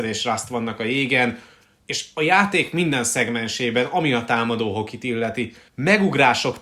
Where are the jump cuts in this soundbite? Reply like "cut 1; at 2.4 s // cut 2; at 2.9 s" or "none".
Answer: cut 1; at 5.7 s